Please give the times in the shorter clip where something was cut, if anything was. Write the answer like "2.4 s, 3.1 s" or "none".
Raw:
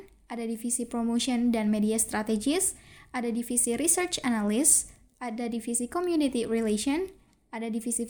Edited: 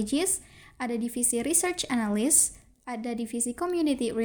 none